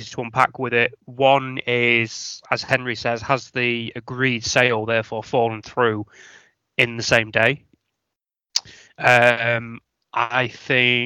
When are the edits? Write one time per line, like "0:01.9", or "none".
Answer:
none